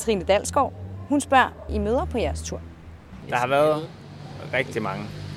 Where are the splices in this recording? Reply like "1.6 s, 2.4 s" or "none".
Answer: 1.7 s, 3.2 s